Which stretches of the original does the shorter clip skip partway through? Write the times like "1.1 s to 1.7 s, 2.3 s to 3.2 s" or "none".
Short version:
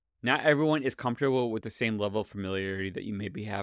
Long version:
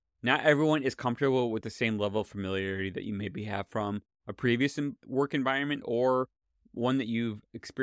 none